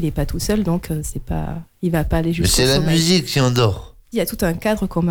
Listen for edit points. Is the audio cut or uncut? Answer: cut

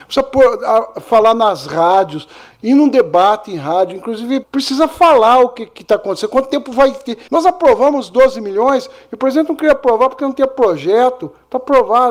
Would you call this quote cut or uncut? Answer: cut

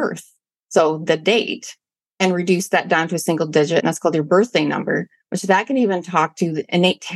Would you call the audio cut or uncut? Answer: uncut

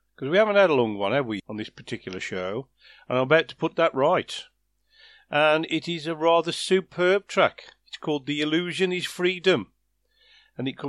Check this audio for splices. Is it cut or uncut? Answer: cut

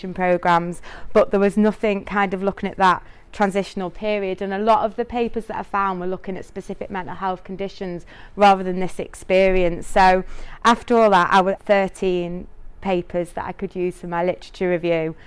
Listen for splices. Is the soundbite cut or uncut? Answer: cut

